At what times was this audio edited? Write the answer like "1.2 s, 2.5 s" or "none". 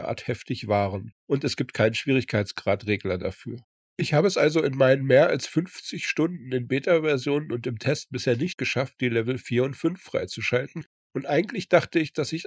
none

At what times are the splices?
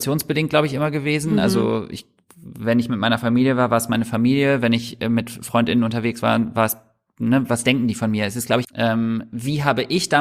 8.6 s

